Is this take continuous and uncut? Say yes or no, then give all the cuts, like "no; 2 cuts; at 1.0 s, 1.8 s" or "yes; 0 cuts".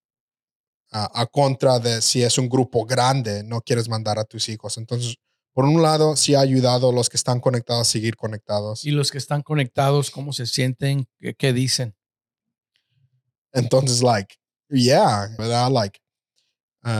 no; 2 cuts; at 13.4 s, 15.4 s